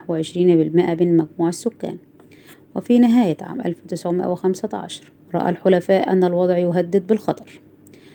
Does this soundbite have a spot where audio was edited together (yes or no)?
yes